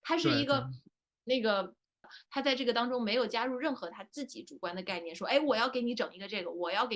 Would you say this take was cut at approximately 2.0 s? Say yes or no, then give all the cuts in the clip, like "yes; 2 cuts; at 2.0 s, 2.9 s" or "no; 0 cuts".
yes; 1 cut; at 2.0 s